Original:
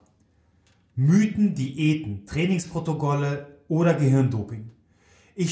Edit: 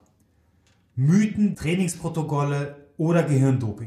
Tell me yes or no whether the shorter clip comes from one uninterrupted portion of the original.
no